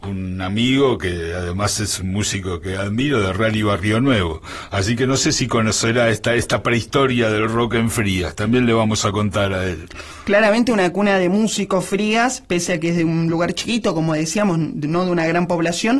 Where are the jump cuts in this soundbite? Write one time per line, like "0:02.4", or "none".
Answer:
none